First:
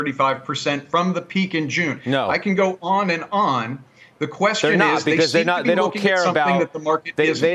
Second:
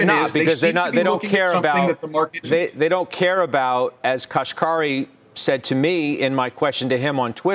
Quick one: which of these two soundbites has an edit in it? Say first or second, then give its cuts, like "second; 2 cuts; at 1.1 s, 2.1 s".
second; 2 cuts; at 2.4 s, 4.0 s